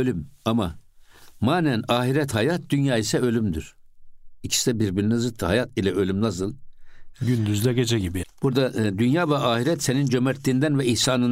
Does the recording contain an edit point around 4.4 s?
no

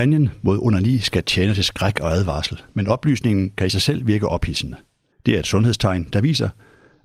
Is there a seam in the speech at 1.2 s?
no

